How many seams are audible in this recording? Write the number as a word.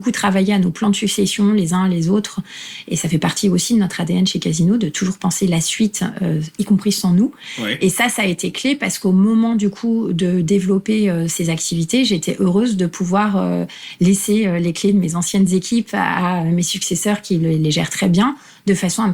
zero